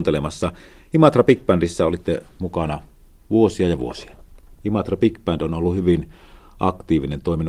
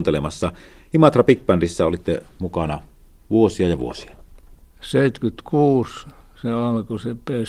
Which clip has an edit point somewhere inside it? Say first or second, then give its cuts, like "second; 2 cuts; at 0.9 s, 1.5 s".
first; 1 cut; at 4.6 s